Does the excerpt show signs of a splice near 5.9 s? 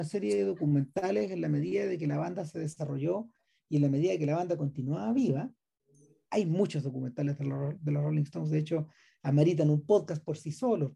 no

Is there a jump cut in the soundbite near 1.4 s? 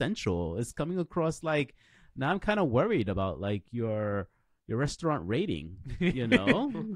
no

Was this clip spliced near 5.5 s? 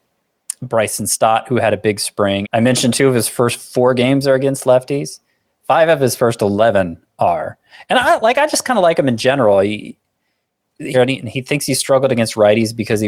no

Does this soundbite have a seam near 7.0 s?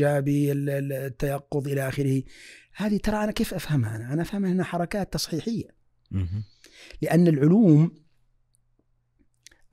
no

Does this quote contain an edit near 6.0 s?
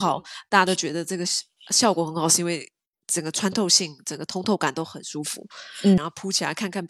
yes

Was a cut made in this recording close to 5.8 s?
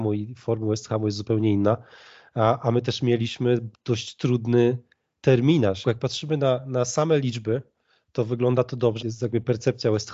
yes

